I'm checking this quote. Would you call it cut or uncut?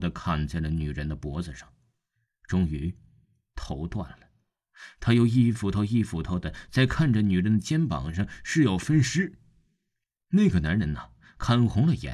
uncut